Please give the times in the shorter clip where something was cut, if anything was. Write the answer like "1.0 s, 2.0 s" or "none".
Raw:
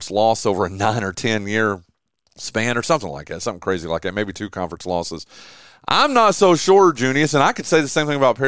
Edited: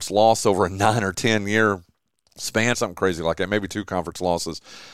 2.7 s